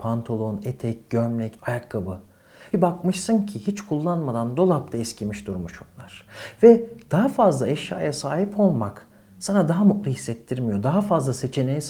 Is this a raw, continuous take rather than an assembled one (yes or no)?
no